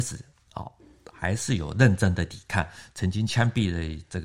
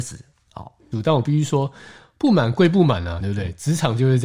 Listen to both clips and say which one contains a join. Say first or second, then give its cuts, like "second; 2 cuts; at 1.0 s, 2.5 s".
second; 2 cuts; at 0.9 s, 3.2 s